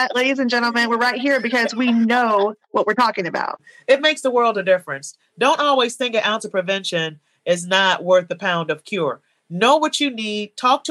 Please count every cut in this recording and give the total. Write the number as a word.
zero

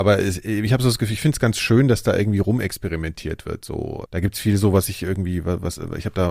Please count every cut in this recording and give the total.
one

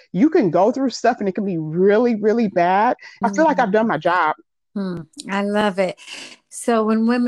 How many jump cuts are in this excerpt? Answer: one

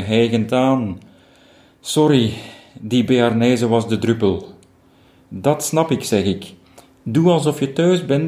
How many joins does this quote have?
zero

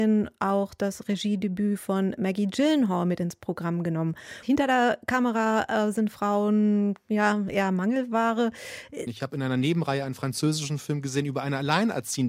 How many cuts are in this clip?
two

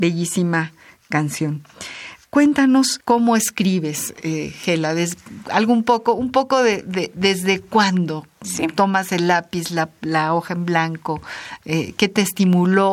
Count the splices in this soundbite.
zero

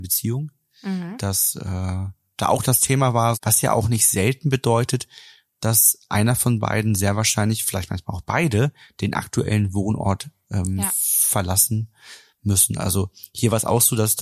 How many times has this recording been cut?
one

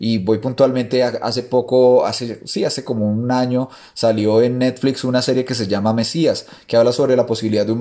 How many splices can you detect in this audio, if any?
zero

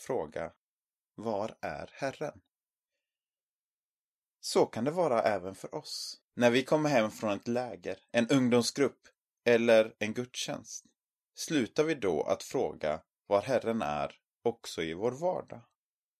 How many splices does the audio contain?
one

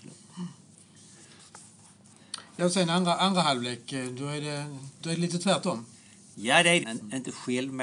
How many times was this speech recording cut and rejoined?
one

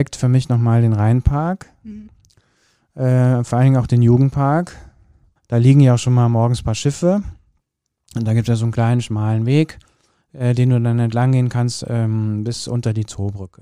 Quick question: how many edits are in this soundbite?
one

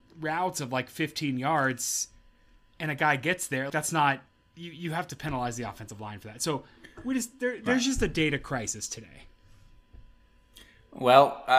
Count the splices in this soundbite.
one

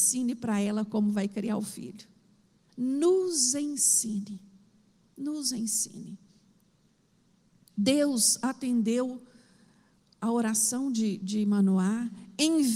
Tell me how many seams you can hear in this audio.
one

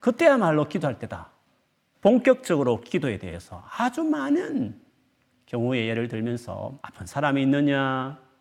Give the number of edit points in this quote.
two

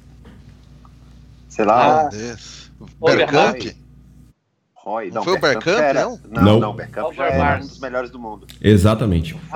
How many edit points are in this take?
zero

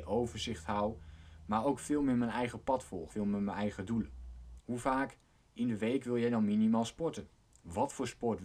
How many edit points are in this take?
two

